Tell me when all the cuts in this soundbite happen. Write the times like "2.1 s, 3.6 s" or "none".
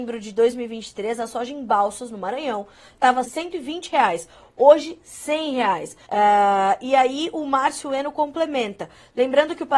3.2 s, 6.1 s